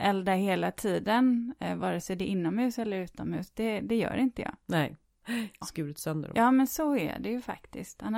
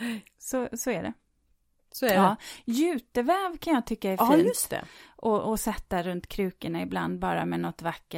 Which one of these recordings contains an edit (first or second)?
first